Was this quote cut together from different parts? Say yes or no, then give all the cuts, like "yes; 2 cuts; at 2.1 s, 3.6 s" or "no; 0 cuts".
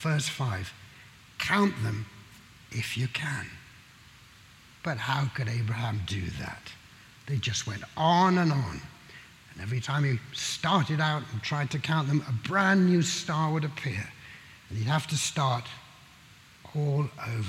no; 0 cuts